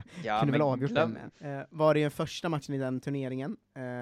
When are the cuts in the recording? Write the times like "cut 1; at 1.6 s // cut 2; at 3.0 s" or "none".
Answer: cut 1; at 1.3 s